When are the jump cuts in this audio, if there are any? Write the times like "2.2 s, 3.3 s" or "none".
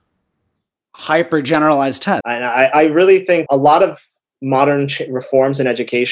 2.2 s, 3.5 s

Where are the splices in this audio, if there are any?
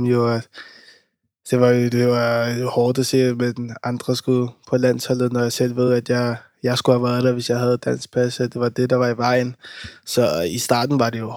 none

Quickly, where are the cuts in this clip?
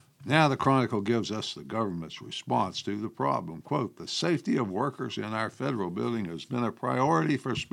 6.4 s

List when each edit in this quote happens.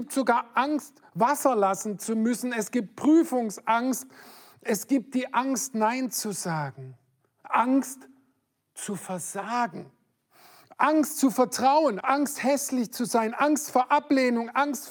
12.0 s

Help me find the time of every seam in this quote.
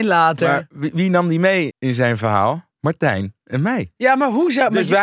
1.7 s

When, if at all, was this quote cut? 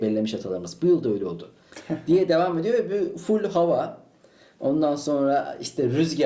1.7 s

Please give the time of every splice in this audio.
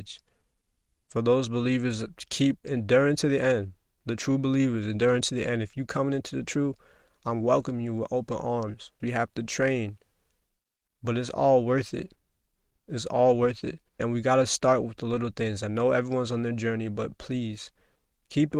9.0 s, 14.0 s

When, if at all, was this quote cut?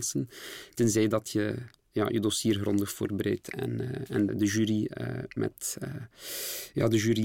4.3 s

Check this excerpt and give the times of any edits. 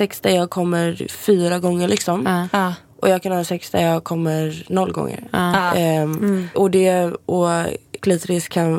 6.5 s

